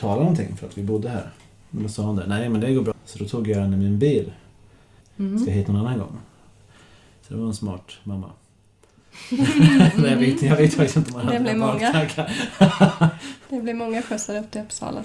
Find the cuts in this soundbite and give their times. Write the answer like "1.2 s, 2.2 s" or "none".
2.9 s, 5.0 s